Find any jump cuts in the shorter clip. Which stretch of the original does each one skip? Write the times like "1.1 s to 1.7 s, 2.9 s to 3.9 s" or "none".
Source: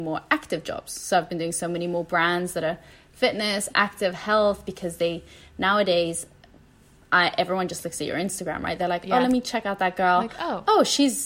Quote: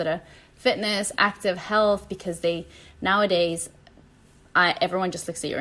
none